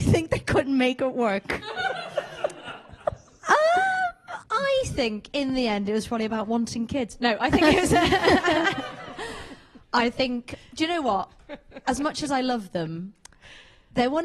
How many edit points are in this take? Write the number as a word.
one